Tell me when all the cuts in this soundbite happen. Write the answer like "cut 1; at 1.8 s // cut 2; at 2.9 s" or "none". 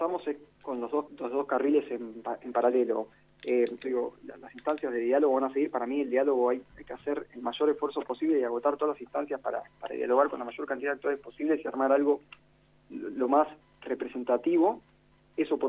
cut 1; at 1.1 s // cut 2; at 3.8 s